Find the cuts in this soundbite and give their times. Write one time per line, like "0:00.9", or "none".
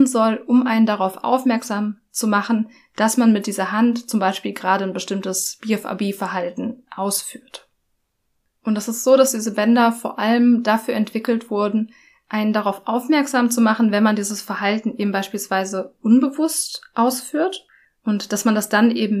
none